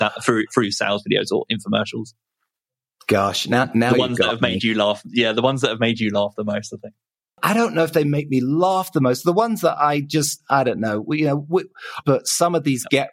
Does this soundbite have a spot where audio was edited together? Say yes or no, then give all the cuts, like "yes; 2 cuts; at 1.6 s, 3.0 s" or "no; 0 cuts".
yes; 1 cut; at 12.0 s